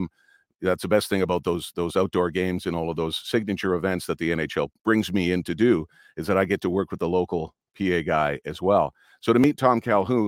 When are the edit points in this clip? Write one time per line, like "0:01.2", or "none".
0:04.8